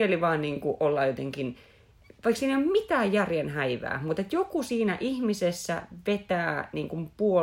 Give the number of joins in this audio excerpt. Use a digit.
0